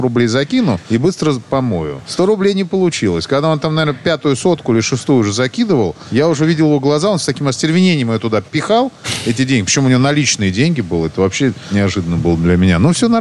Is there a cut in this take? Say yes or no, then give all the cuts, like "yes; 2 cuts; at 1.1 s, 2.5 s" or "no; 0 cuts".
no; 0 cuts